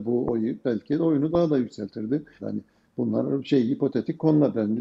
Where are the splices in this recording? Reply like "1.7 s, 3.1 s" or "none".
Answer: 2.4 s